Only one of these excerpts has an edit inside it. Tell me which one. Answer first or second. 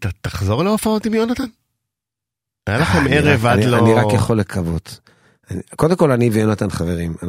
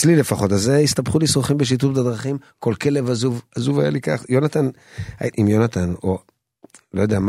second